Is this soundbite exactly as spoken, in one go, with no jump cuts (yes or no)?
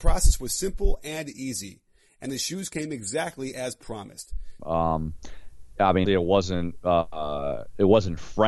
no